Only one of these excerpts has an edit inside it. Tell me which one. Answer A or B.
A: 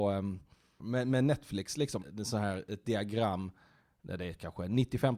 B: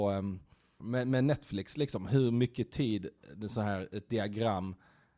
A